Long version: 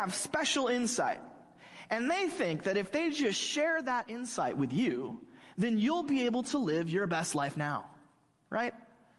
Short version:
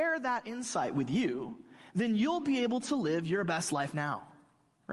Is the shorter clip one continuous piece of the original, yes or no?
yes